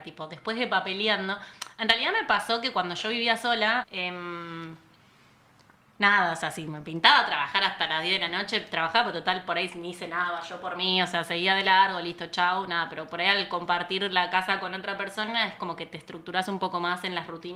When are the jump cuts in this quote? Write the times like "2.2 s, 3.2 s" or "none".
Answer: 3.8 s